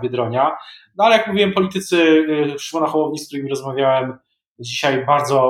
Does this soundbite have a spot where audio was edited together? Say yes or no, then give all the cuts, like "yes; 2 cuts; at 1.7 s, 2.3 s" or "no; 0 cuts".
no; 0 cuts